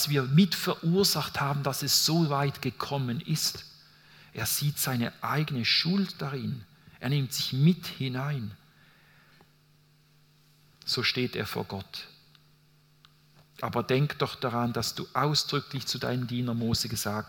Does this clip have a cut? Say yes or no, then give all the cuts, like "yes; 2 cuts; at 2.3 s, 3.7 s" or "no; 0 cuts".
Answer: no; 0 cuts